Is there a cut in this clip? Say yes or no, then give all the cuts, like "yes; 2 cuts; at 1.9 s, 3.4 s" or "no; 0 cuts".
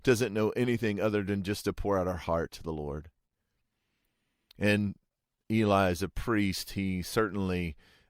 no; 0 cuts